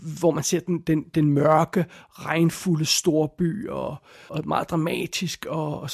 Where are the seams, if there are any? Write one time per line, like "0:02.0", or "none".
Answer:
0:04.3